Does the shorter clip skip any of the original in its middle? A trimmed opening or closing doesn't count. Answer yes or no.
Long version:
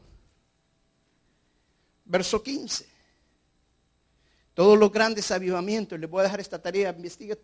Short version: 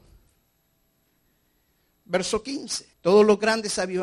yes